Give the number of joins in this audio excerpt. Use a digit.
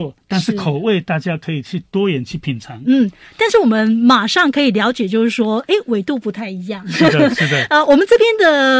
0